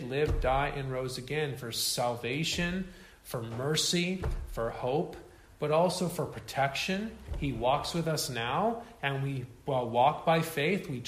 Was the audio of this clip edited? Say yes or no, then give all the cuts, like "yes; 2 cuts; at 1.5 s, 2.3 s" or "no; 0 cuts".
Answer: no; 0 cuts